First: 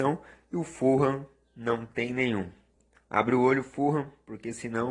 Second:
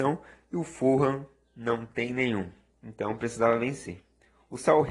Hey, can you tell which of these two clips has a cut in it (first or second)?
second